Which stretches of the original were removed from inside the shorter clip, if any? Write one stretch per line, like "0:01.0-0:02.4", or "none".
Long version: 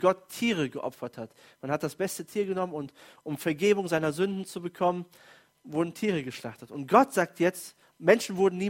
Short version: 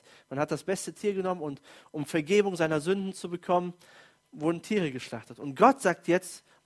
none

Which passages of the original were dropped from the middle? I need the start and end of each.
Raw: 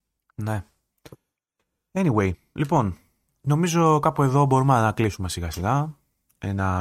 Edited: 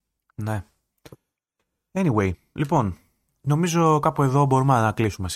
none

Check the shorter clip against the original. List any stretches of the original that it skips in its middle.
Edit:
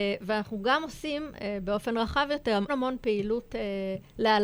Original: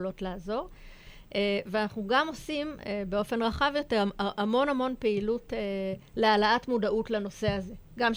0:04.1-0:04.7

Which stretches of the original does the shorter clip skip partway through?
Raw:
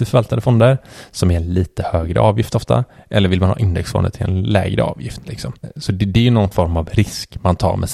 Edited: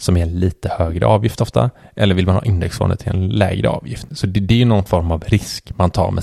0:05.2-0:05.7

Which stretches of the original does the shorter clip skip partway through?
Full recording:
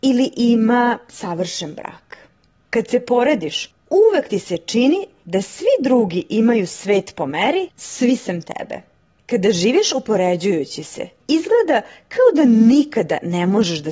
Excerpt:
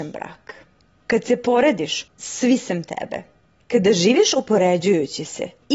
0:03.8-0:07.7

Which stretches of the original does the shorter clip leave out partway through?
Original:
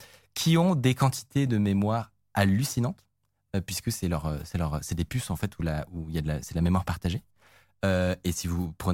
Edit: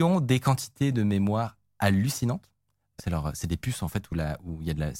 0:03.5-0:04.5

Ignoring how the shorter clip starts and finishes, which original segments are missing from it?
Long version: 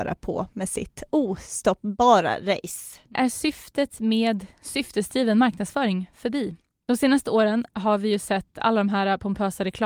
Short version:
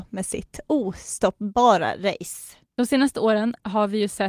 0:03.1-0:06.7

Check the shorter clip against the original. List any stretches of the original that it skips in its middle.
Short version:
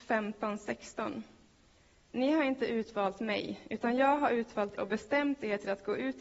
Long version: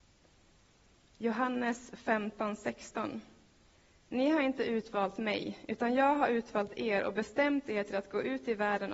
0:06.8-0:07.0

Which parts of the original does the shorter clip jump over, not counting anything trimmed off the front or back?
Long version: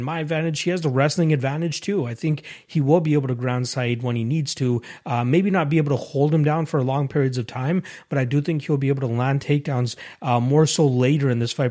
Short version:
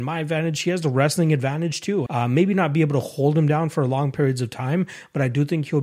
0:02.1-0:05.0

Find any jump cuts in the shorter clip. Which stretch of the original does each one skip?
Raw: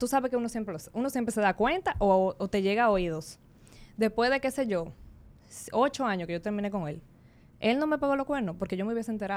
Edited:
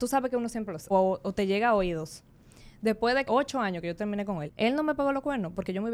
0:00.9-0:02.1
0:04.4-0:05.7
0:06.9-0:07.5

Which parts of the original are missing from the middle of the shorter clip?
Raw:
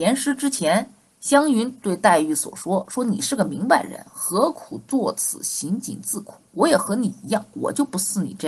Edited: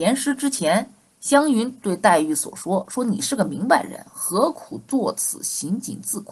none

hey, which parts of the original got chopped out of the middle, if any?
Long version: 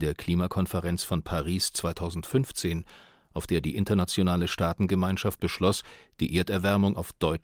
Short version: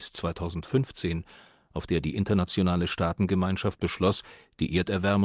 none

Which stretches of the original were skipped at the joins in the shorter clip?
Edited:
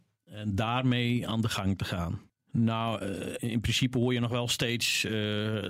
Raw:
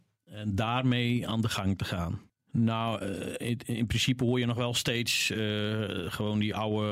0:03.4-0:03.6

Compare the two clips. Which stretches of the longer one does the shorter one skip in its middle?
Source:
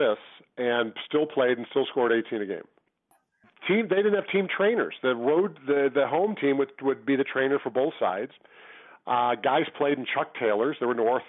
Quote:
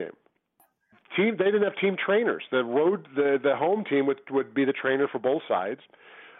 none

